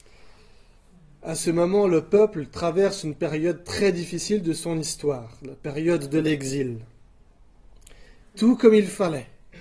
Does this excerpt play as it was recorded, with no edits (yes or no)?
no